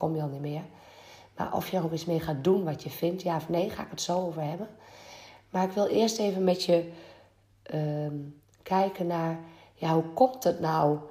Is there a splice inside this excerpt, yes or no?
no